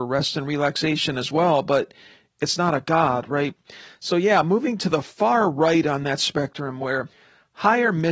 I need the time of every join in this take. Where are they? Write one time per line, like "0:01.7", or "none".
none

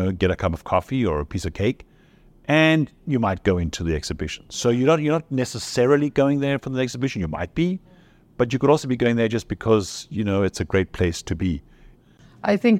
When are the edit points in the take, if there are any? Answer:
none

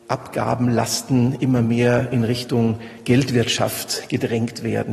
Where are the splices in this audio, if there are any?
none

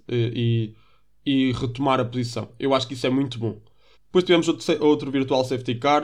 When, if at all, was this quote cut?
0:03.9

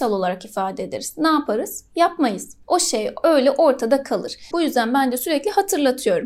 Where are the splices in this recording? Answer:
0:04.5

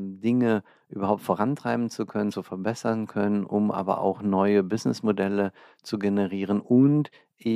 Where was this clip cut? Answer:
none

